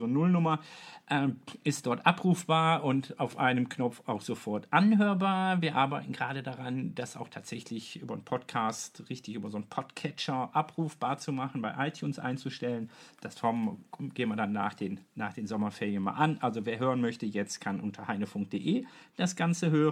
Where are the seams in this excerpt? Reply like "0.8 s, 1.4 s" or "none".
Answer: none

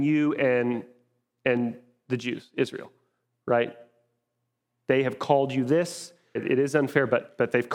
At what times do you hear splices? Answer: 6.4 s

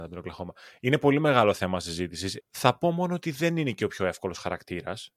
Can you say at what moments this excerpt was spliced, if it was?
2.4 s

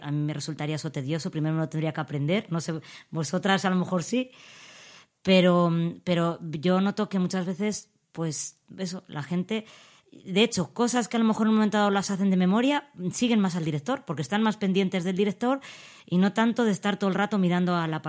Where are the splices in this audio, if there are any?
none

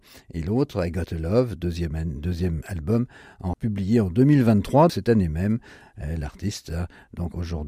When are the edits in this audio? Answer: 3.5 s, 4.9 s

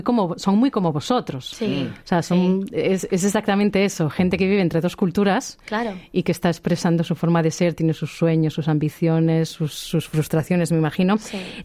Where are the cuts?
none

